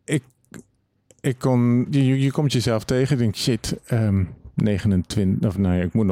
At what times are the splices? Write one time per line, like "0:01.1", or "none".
0:01.9
0:04.5